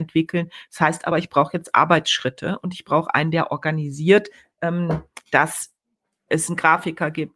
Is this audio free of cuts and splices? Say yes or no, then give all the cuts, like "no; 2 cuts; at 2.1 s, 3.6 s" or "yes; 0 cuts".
yes; 0 cuts